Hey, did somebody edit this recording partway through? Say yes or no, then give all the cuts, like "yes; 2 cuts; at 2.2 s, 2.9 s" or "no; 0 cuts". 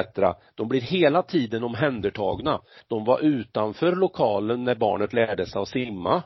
yes; 1 cut; at 2.8 s